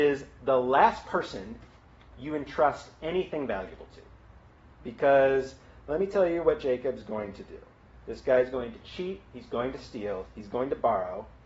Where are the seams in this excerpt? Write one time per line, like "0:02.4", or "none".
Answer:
none